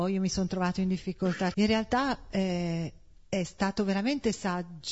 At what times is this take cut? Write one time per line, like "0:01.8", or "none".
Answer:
0:01.5